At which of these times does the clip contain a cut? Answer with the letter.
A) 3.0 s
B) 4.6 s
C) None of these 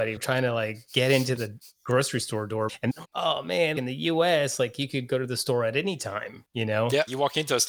A